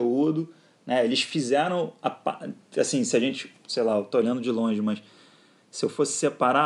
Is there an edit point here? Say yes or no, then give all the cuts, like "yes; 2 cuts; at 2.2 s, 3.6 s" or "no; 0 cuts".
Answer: no; 0 cuts